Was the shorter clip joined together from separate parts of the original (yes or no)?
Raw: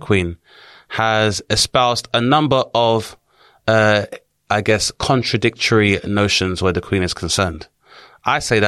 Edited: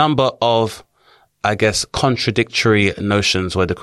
yes